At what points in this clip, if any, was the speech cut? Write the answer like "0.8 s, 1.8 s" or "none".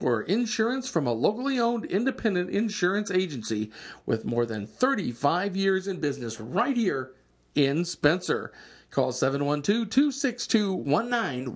none